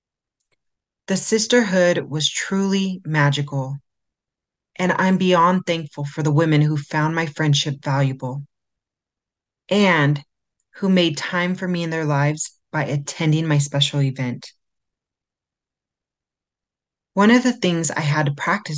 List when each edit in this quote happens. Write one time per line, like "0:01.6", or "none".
none